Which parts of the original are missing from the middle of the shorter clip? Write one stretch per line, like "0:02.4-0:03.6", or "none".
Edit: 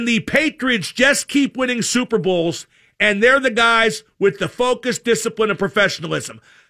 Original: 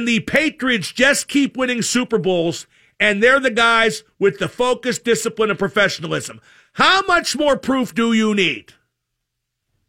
none